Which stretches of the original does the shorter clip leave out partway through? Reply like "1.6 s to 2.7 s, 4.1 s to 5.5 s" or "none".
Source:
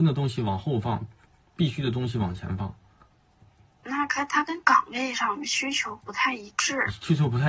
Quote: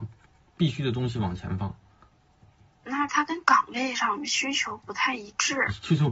4.1 s to 4.3 s

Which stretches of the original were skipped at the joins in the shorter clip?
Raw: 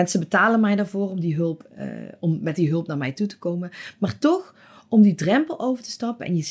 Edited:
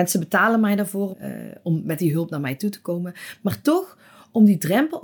1.1 s to 1.7 s

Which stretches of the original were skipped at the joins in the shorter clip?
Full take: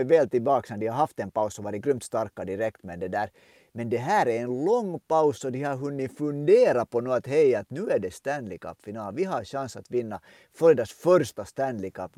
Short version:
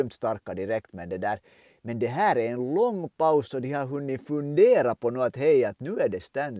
none

